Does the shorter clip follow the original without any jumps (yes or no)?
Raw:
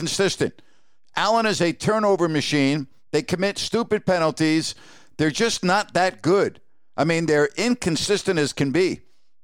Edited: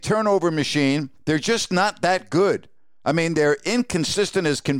no